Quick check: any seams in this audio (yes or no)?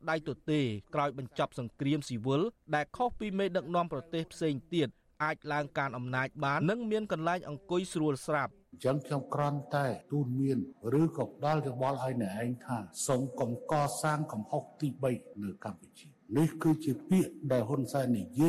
yes